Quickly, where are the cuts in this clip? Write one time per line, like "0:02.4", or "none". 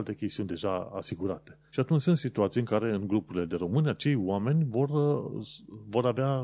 0:01.7